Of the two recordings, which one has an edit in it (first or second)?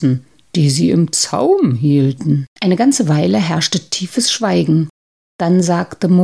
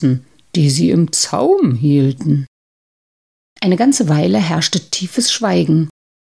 first